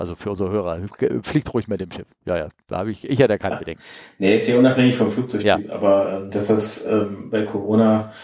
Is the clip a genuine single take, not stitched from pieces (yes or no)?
yes